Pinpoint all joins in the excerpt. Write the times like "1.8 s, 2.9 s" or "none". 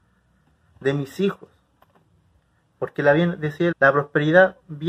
3.7 s